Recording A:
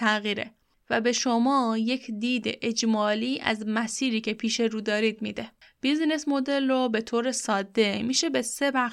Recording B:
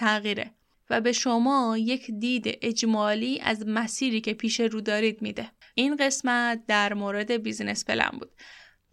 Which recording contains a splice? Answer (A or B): B